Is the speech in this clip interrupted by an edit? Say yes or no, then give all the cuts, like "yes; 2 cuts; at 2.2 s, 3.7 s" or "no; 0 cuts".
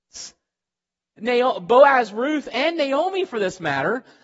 no; 0 cuts